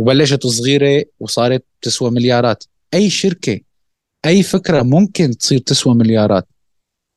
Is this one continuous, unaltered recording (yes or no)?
yes